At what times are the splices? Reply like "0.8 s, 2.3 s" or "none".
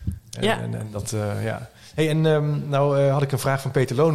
none